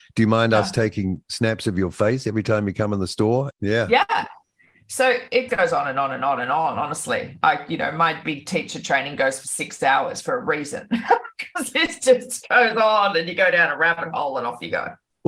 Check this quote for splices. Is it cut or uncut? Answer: cut